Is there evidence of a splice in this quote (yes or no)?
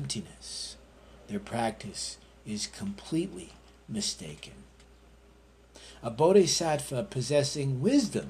no